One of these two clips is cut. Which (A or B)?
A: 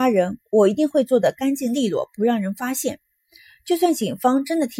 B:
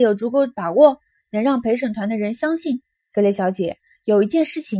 B